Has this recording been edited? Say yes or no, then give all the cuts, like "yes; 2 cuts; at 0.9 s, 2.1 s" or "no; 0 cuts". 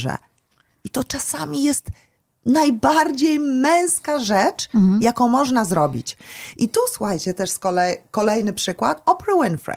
no; 0 cuts